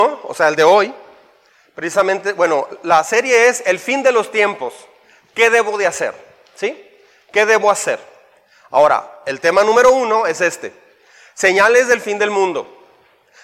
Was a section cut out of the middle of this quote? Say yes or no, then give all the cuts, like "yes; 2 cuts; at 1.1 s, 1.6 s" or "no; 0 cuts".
no; 0 cuts